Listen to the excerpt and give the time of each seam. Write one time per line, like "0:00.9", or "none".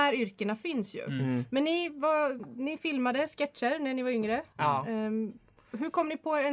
none